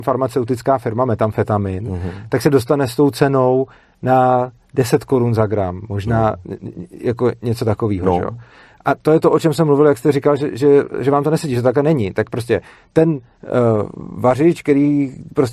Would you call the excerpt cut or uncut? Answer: uncut